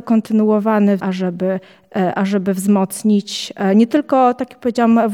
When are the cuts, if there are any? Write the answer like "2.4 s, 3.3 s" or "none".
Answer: 1.0 s